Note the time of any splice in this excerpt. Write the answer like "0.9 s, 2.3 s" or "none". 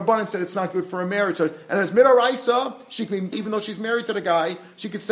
3.3 s